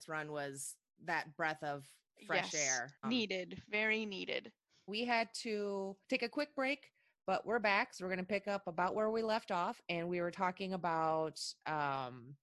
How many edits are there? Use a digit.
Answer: 3